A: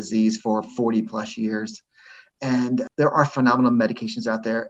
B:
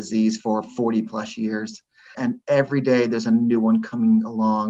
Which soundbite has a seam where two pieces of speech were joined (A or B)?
B